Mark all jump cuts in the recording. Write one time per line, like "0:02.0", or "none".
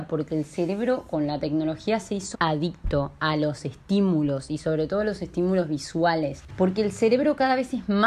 0:02.3
0:06.5